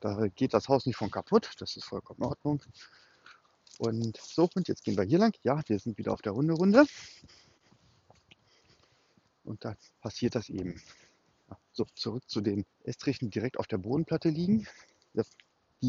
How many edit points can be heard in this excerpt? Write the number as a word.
one